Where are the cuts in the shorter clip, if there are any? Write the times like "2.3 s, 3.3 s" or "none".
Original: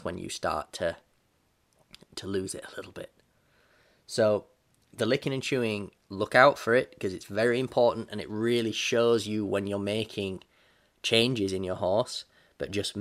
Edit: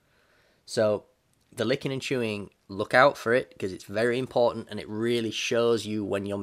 none